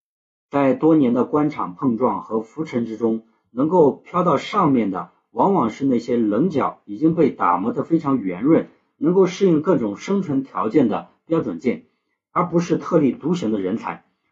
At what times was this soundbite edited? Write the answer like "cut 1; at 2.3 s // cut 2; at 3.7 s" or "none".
none